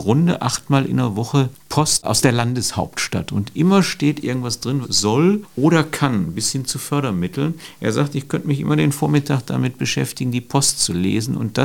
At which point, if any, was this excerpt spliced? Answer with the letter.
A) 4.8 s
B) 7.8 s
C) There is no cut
A